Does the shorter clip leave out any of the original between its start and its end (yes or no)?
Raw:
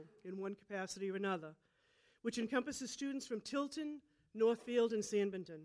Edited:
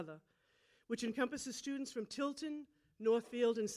no